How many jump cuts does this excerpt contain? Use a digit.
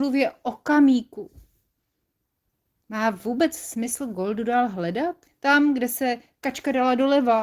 1